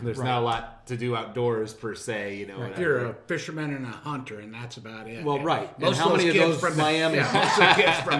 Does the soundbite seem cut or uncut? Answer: cut